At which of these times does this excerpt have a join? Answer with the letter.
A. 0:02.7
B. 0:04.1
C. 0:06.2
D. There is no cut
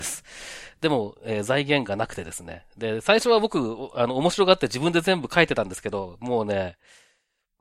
D